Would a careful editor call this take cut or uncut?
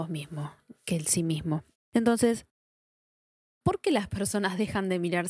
cut